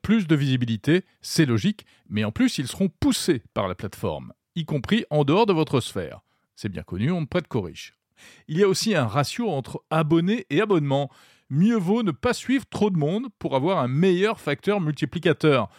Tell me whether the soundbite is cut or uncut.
uncut